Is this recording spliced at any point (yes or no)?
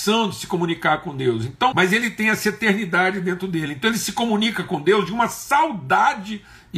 yes